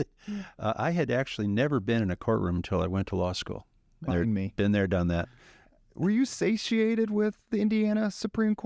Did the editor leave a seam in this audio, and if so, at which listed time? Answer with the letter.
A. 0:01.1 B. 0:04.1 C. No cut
B